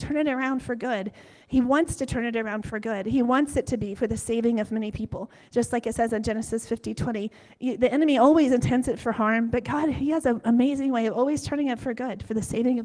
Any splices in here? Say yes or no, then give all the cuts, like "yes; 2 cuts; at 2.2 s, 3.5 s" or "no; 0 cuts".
no; 0 cuts